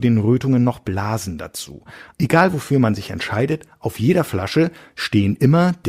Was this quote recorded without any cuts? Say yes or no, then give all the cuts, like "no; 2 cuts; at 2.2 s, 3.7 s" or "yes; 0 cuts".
no; 1 cut; at 2.1 s